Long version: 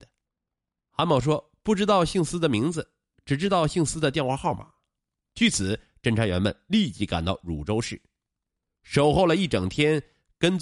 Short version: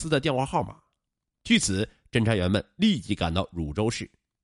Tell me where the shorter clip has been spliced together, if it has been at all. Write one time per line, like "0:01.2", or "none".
none